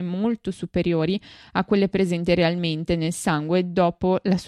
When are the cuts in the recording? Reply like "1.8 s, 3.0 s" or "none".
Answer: none